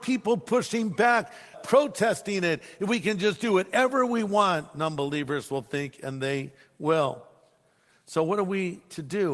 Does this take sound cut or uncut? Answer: cut